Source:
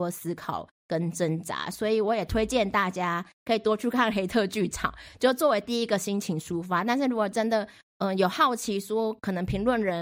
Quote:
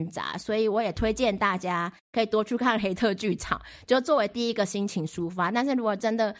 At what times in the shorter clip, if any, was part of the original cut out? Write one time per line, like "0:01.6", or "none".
none